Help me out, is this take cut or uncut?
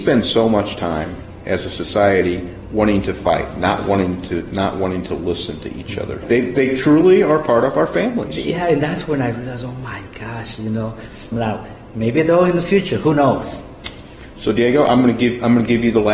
cut